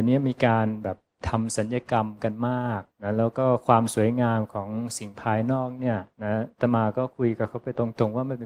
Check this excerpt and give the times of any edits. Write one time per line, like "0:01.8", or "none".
0:02.9
0:06.1